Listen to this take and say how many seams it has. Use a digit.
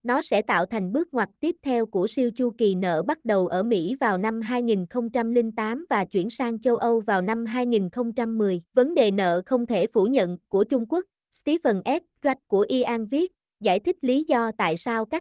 1